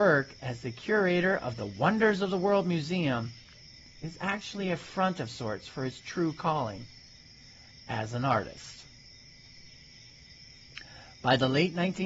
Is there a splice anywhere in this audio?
no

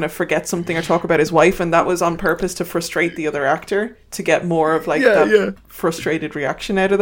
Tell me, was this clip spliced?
no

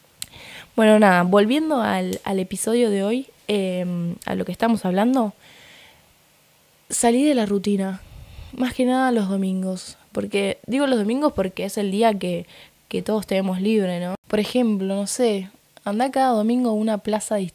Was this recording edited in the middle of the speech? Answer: no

